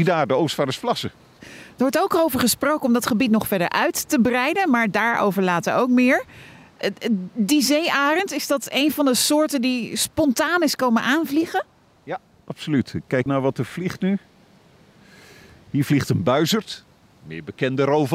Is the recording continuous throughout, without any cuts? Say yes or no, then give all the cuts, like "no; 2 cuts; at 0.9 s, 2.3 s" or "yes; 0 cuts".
no; 2 cuts; at 1.4 s, 13.3 s